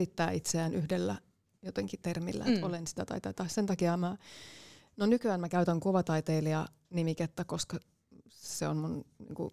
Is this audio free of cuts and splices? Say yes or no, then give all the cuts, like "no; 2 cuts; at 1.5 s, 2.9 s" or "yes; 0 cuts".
yes; 0 cuts